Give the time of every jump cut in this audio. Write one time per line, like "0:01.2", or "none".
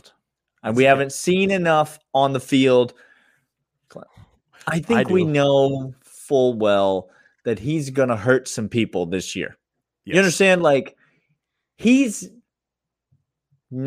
0:03.9